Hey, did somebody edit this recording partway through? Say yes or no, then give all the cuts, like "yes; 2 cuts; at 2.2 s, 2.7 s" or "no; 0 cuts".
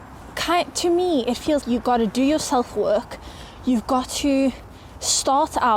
yes; 1 cut; at 1.6 s